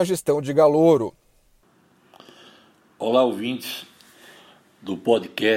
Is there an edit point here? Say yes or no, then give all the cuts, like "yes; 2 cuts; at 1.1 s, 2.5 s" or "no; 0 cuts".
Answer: no; 0 cuts